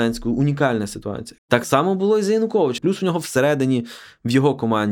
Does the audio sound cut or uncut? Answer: cut